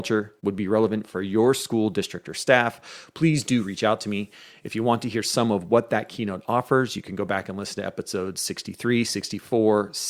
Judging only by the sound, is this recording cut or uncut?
uncut